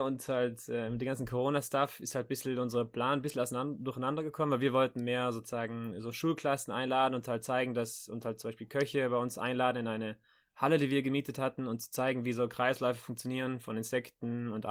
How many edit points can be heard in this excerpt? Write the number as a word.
zero